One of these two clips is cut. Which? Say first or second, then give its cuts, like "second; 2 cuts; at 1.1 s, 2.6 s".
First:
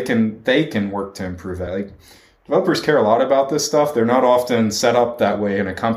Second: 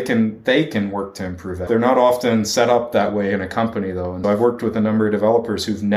second; 2 cuts; at 1.7 s, 4.2 s